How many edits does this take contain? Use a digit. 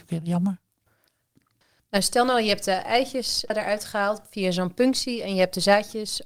1